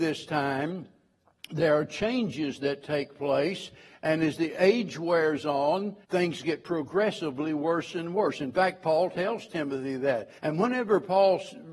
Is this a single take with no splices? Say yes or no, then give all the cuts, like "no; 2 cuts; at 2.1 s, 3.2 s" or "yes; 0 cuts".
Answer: no; 2 cuts; at 6.0 s, 10.4 s